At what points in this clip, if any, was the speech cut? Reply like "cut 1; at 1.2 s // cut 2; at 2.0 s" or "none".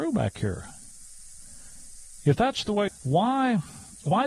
cut 1; at 2.9 s

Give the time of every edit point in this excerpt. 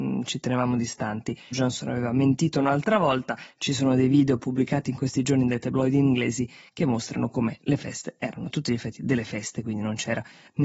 cut 1; at 1.5 s

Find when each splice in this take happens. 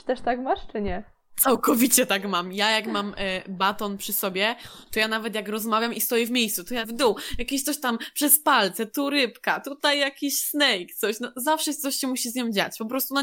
cut 1; at 6.8 s

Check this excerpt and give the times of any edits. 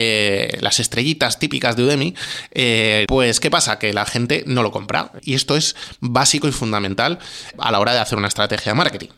cut 1; at 3.1 s // cut 2; at 5.2 s // cut 3; at 7.5 s

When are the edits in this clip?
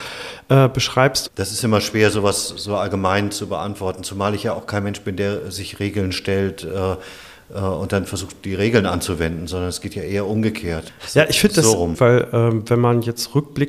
cut 1; at 1.3 s // cut 2; at 10.9 s // cut 3; at 11.9 s

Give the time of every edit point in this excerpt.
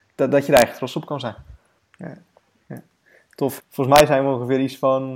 cut 1; at 1.8 s // cut 2; at 3.6 s

